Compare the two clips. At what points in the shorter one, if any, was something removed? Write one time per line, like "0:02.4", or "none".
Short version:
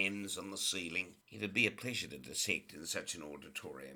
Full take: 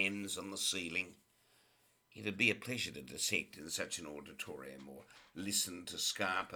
0:01.2